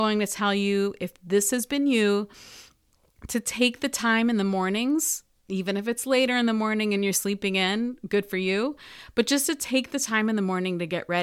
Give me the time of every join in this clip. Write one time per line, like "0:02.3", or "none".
none